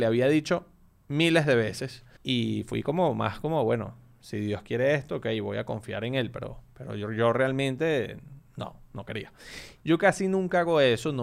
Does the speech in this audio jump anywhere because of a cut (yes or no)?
yes